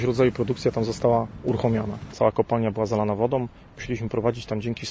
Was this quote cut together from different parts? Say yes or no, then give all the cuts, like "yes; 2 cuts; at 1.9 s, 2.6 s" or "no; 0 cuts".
yes; 1 cut; at 2.1 s